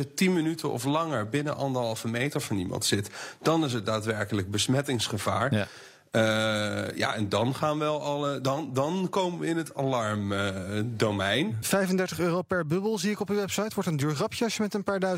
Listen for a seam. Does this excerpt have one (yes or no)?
yes